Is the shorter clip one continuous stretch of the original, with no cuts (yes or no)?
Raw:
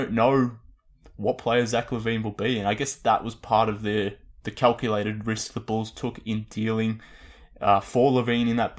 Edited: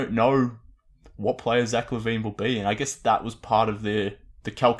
yes